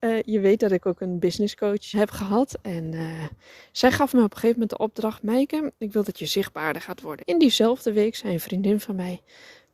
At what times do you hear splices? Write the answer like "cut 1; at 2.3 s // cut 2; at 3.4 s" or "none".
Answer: cut 1; at 1.9 s // cut 2; at 7.2 s